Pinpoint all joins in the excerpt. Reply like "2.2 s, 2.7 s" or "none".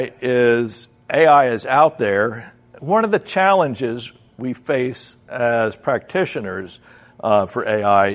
2.8 s